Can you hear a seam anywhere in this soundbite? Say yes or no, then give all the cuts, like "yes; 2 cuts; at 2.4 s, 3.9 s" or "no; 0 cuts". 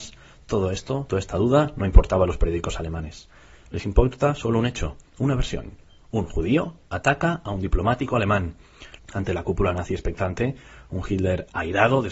yes; 1 cut; at 9.0 s